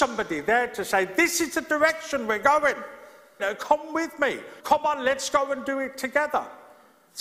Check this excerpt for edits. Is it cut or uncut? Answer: cut